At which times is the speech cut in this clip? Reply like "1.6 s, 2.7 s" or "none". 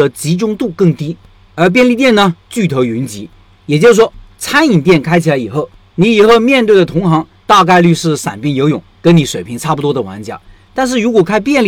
none